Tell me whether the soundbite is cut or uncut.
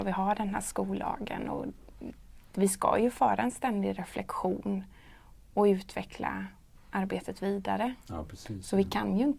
uncut